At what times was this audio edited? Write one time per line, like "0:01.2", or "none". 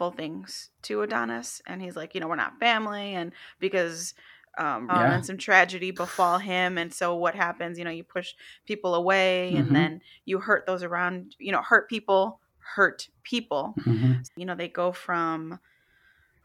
0:04.9
0:11.4
0:14.2